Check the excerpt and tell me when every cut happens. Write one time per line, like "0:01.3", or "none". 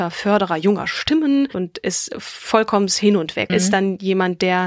0:03.5